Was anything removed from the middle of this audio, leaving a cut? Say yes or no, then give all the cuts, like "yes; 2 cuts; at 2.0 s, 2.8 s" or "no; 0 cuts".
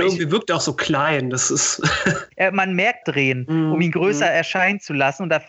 yes; 1 cut; at 3.0 s